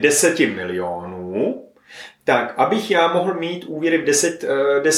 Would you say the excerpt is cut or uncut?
uncut